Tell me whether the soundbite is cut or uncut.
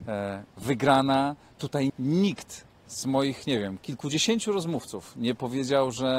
cut